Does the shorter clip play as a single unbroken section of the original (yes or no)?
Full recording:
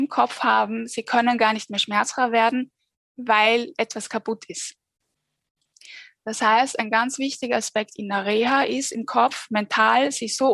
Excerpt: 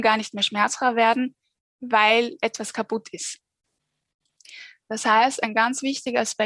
yes